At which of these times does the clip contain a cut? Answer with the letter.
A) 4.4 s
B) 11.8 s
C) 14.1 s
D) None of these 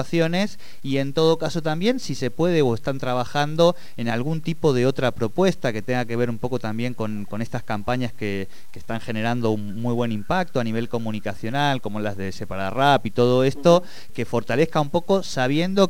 C